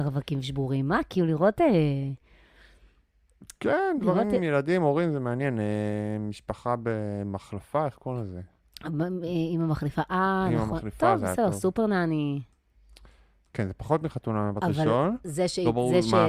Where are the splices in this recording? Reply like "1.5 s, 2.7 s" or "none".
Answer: none